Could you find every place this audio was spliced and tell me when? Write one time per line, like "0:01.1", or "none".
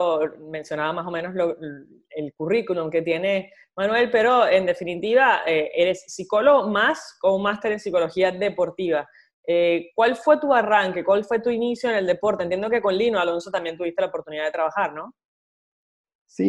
none